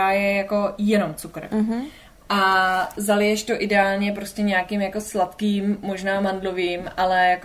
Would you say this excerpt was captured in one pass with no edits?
yes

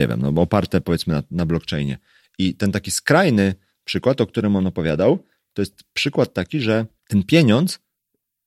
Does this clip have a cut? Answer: yes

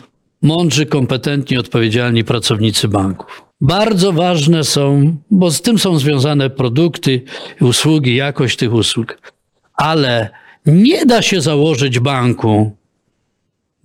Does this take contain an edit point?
yes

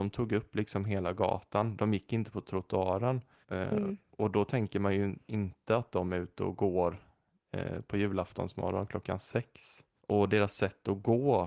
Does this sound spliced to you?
yes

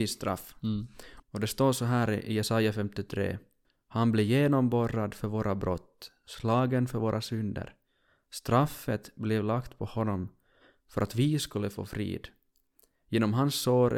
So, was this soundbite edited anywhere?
yes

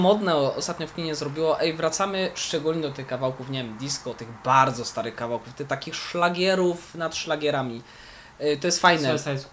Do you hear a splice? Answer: no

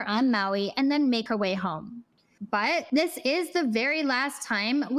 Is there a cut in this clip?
yes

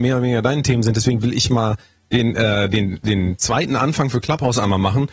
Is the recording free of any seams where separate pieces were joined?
yes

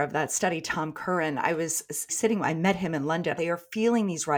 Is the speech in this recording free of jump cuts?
no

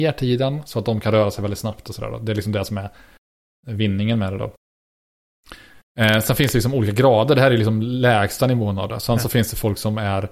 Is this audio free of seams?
yes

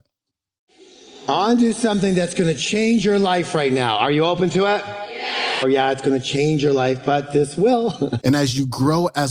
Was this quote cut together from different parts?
yes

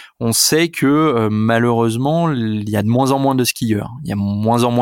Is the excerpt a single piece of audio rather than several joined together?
yes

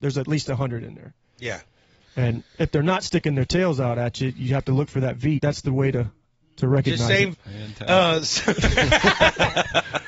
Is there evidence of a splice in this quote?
yes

